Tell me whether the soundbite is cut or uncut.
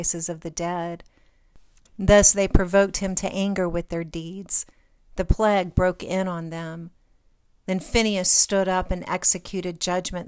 uncut